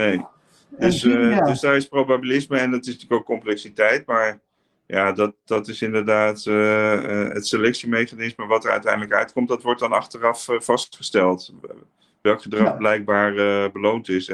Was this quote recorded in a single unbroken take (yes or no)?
yes